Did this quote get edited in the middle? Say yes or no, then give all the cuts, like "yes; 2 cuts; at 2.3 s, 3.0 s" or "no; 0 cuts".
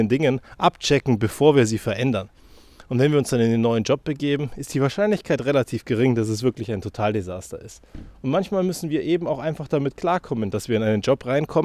no; 0 cuts